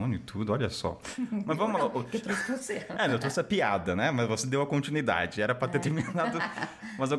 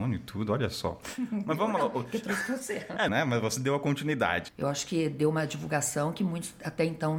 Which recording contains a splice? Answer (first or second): second